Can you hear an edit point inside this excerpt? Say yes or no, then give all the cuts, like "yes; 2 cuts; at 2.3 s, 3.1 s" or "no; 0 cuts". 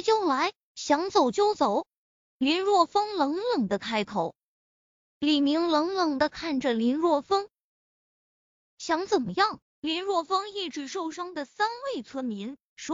yes; 2 cuts; at 5.0 s, 9.6 s